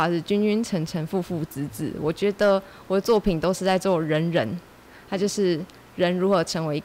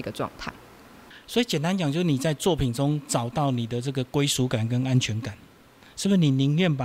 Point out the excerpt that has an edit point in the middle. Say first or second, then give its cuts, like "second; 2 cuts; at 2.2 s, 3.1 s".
second; 1 cut; at 1.2 s